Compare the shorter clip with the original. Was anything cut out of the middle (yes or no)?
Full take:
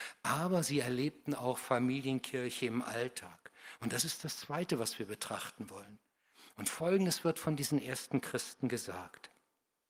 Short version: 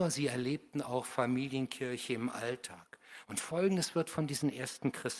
yes